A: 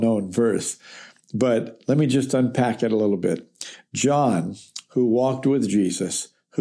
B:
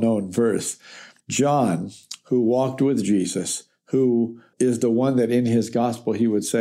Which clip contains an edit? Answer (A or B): B